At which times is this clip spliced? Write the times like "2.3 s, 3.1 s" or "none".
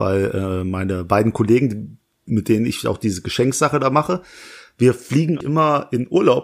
5.4 s

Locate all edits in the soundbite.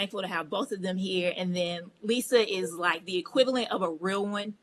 none

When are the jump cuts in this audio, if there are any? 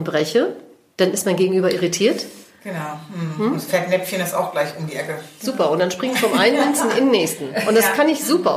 none

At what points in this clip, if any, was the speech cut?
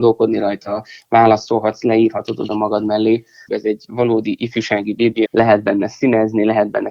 3.5 s, 5.3 s

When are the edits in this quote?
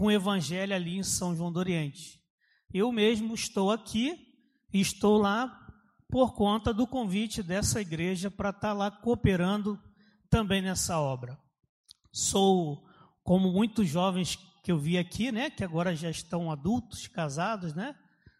none

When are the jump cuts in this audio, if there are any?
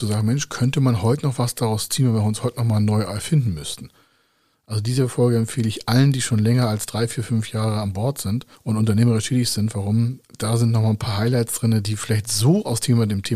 none

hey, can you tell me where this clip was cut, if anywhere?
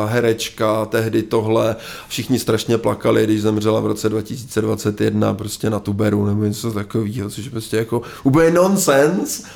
none

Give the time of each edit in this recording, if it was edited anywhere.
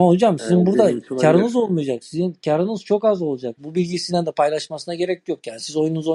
3.6 s

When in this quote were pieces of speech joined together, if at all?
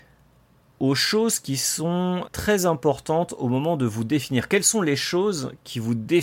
2.3 s

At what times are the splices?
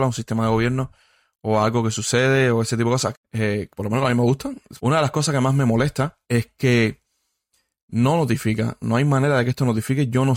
3.1 s, 4.8 s, 6.2 s

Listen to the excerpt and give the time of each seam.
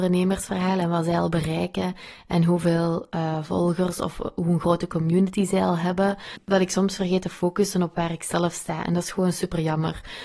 none

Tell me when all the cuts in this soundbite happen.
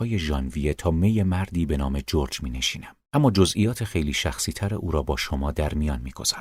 3.1 s

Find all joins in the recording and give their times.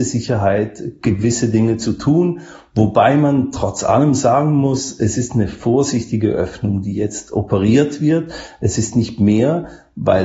none

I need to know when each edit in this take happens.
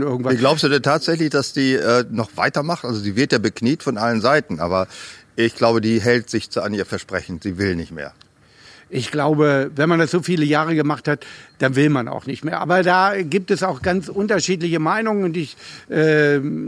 none

